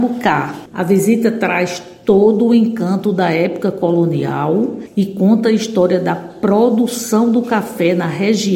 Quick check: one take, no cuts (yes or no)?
yes